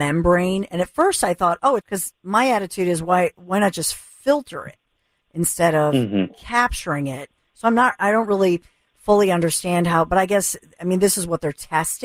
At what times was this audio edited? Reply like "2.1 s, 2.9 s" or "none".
1.8 s